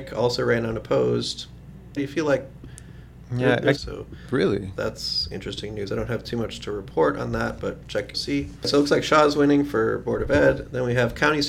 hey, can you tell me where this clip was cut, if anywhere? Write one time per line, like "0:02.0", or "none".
0:02.0
0:03.8
0:08.1